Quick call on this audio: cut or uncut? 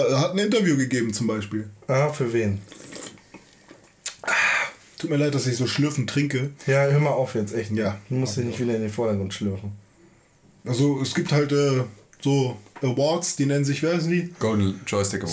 uncut